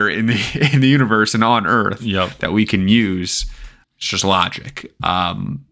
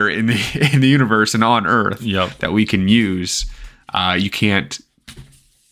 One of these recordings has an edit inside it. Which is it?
first; 1 cut; at 3.8 s

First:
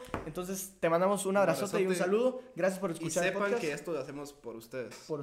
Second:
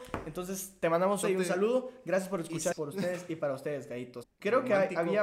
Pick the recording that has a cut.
second; 3 cuts; at 1.2 s, 2.7 s, 4.2 s

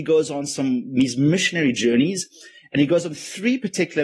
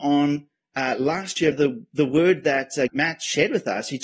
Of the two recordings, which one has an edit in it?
second; 2 cuts; at 1.5 s, 2.9 s

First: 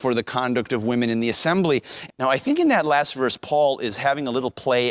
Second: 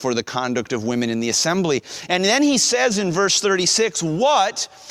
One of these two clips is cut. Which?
first; 1 cut; at 2.1 s

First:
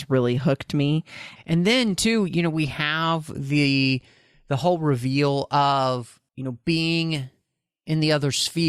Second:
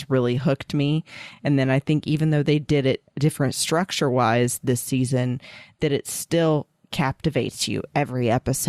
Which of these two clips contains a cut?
first; 2 cuts; at 1.4 s, 6.3 s

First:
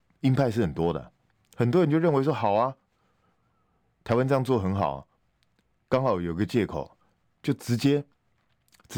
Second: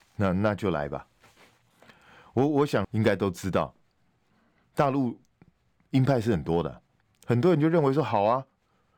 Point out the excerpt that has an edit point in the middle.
second; 1 cut; at 2.8 s

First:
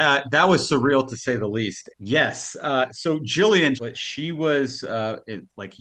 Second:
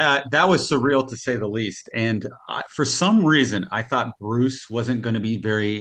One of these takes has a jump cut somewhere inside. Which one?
first; 2 cuts; at 1.9 s, 3.8 s

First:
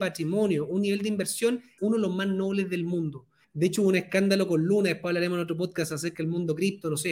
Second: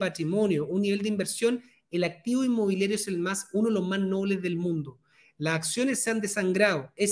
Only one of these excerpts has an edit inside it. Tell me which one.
first; 2 cuts; at 1.8 s, 3.4 s

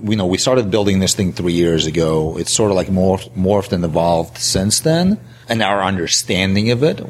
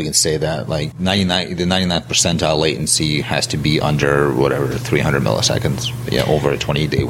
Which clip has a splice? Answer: second; 1 cut; at 0.9 s

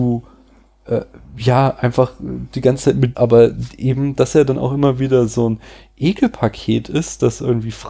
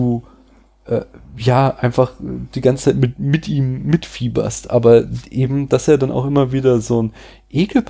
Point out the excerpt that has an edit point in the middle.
first; 1 cut; at 3.1 s

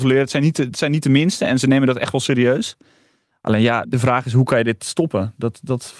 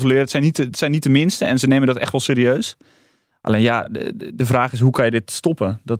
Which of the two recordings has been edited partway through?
first; 1 cut; at 3.8 s

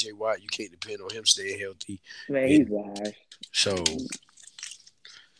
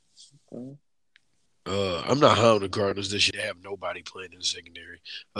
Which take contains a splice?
second; 2 cuts; at 1.5 s, 3.3 s

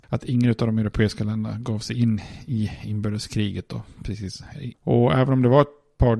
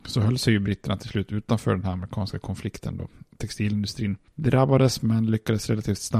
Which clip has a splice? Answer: first; 1 cut; at 4.7 s

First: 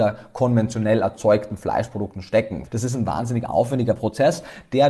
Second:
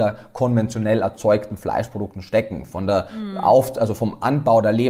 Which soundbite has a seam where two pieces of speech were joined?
first; 1 cut; at 2.7 s

